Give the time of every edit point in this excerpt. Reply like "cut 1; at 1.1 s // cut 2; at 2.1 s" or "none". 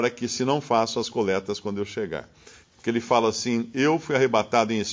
cut 1; at 2.6 s